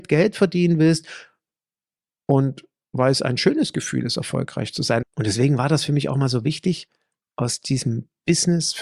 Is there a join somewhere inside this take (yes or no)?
yes